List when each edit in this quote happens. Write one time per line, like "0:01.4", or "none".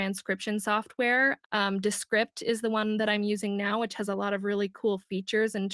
0:01.4